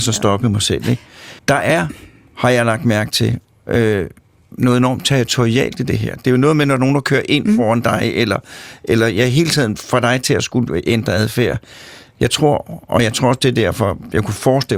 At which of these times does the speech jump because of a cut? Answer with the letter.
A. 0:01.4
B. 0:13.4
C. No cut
A